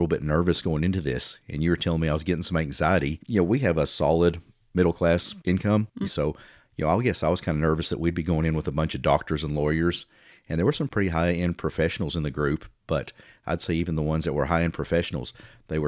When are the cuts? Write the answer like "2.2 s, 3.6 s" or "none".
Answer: 6.0 s